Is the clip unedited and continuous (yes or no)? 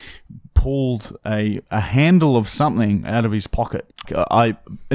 no